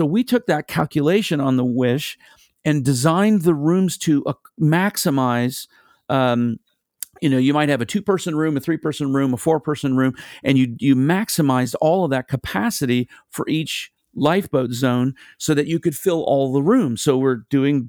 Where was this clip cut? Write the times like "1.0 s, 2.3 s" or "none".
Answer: none